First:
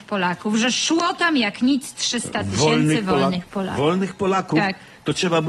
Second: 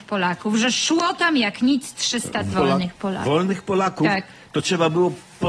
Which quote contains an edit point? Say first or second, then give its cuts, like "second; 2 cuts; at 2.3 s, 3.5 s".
second; 1 cut; at 2.5 s